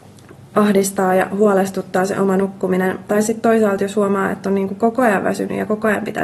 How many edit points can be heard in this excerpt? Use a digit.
0